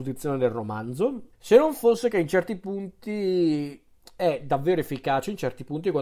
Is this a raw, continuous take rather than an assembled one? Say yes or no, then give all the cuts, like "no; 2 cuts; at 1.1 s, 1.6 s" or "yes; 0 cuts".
no; 1 cut; at 1.3 s